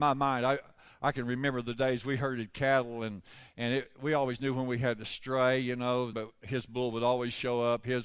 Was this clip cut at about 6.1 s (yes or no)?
yes